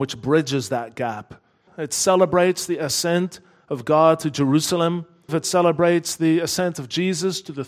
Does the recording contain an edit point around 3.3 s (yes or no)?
no